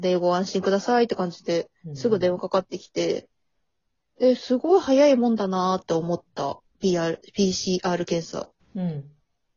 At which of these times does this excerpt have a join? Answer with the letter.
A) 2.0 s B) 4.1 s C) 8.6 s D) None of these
C